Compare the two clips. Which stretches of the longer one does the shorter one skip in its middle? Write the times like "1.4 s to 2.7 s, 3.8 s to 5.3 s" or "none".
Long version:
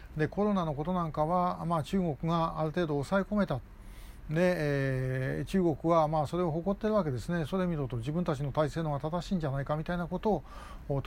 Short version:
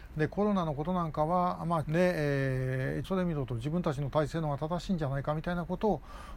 1.8 s to 4.3 s, 5.5 s to 7.5 s